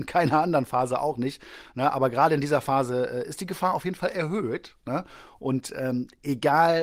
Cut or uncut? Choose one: uncut